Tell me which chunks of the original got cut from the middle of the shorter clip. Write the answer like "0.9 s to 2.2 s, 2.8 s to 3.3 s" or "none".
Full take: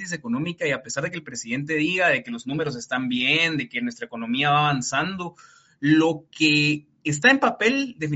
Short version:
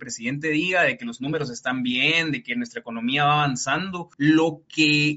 5.4 s to 5.8 s